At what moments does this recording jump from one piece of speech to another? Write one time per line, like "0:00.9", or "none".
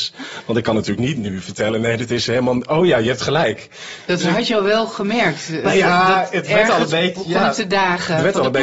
none